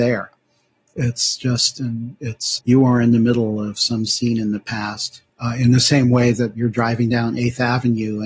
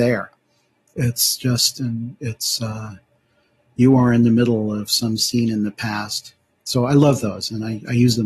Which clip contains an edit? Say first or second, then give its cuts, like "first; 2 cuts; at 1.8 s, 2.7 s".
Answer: first; 2 cuts; at 2.6 s, 5.3 s